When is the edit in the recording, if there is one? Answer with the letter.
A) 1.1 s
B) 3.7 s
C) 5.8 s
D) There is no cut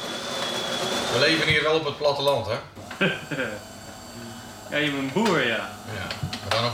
D